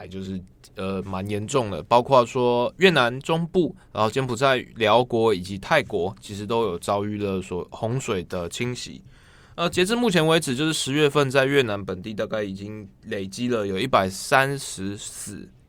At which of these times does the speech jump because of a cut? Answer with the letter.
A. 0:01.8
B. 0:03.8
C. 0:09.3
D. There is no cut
B